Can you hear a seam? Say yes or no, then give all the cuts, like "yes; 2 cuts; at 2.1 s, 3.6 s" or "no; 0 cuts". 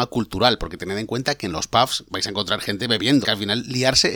yes; 2 cuts; at 2.1 s, 3.2 s